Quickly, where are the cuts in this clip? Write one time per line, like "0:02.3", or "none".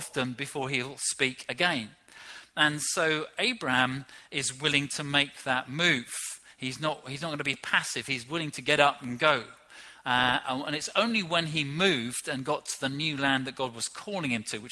none